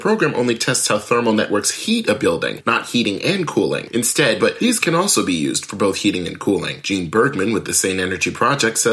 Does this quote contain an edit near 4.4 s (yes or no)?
yes